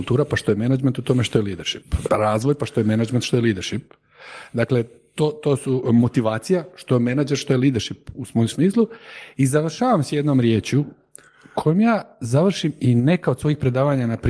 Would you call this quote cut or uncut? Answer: cut